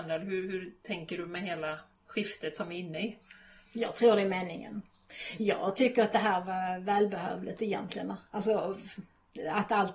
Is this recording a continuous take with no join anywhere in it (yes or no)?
yes